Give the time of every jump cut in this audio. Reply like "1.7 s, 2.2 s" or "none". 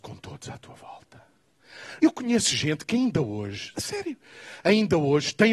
2.0 s, 3.7 s